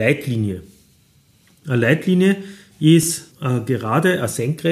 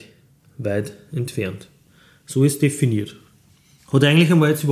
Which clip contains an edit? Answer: first; 1 cut; at 3.3 s

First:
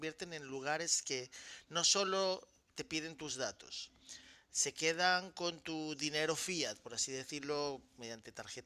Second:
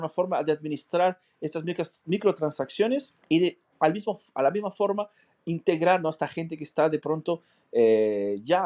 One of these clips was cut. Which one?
second; 1 cut; at 3.2 s

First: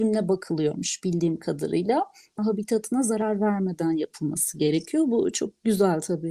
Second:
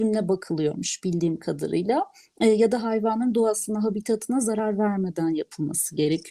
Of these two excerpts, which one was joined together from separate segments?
first; 1 cut; at 2.4 s

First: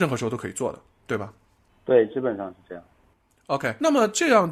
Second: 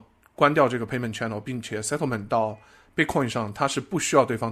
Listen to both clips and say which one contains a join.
first; 1 cut; at 1.7 s

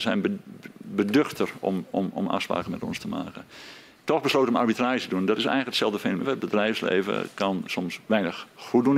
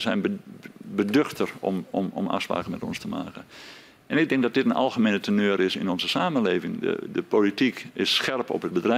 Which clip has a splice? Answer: first; 2 cuts; at 4.0 s, 6.2 s

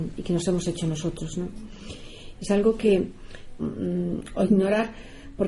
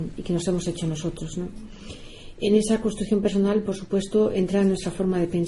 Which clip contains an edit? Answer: first; 2 cuts; at 2.3 s, 3.6 s

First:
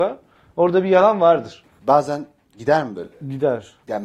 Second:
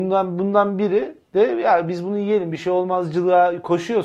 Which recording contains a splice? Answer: first; 1 cut; at 1.7 s

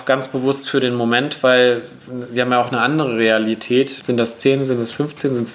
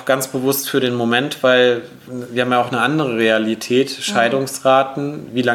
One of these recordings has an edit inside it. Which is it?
first; 1 cut; at 4.0 s

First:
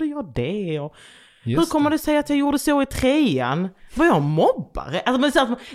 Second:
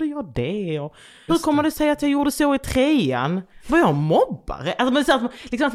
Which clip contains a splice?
second; 1 cut; at 1.3 s

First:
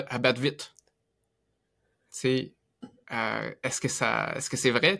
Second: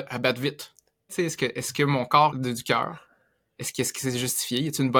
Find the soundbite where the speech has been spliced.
second; 2 cuts; at 1.1 s, 2.3 s

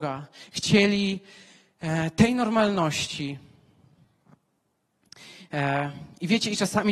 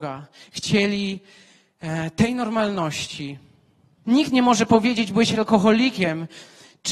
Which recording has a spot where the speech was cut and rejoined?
second; 1 cut; at 4.0 s

